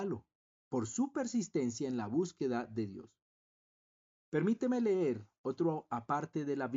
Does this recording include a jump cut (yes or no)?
no